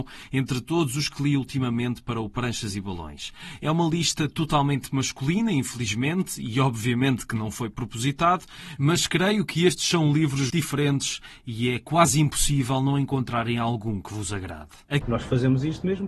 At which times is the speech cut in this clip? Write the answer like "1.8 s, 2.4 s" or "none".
10.5 s, 15.0 s